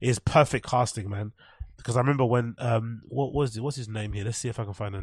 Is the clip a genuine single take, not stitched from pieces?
yes; 0 cuts

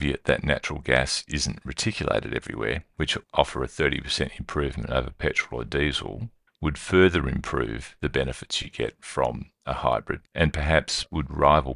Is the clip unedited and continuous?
no; 2 cuts; at 2.9 s, 10.3 s

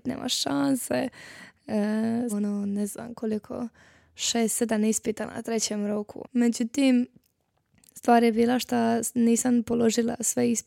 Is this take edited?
yes; 2 cuts; at 2.3 s, 6.2 s

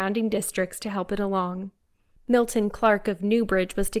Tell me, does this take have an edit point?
yes; 1 cut; at 2.2 s

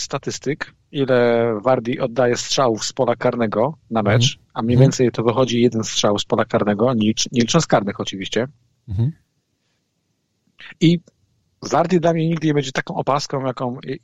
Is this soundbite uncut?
yes; 0 cuts

